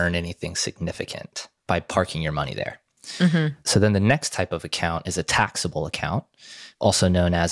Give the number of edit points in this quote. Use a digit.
0